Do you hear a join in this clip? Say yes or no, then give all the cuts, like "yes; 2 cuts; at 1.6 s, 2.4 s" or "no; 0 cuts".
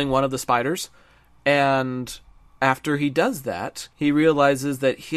yes; 1 cut; at 3.9 s